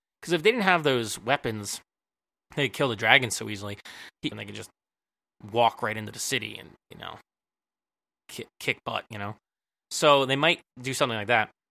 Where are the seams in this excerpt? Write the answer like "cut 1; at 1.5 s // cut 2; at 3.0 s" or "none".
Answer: cut 1; at 4.3 s